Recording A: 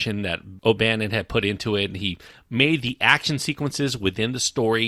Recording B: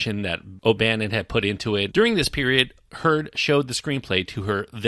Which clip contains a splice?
B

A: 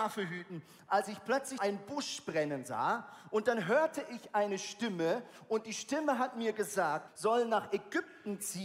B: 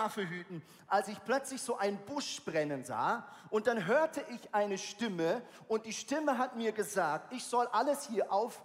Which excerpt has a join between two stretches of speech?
A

